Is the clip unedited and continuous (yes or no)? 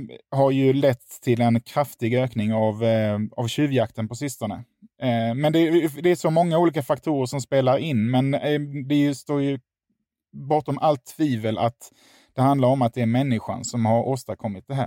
yes